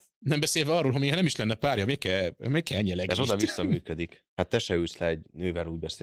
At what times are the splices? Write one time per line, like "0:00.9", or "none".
0:04.3